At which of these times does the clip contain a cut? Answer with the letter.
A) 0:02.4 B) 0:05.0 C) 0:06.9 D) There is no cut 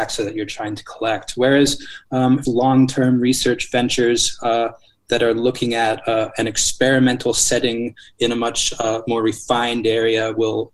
A